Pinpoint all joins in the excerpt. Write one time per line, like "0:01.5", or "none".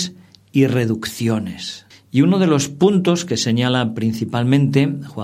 0:01.9